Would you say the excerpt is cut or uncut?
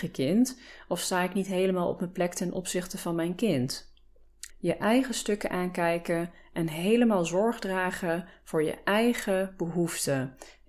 cut